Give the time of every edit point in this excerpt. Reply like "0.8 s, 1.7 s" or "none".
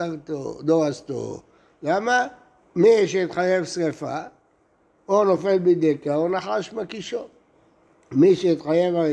2.6 s

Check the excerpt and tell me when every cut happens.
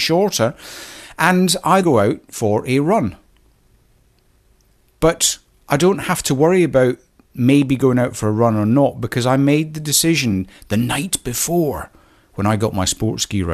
1.8 s

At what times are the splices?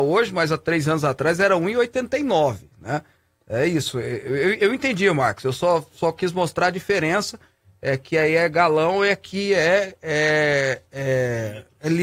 none

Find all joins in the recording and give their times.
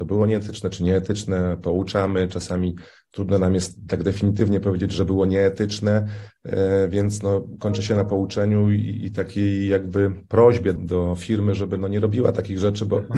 10.8 s

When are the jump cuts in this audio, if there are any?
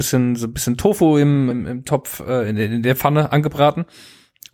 1.5 s

